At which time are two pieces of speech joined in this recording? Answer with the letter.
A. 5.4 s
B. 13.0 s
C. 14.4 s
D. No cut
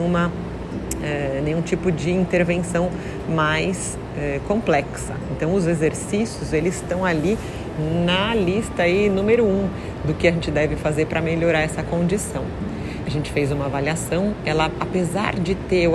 B